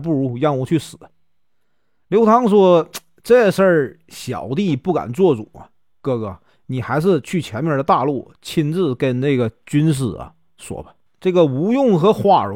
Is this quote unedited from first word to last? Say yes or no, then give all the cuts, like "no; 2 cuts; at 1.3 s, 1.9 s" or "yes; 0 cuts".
no; 1 cut; at 11.1 s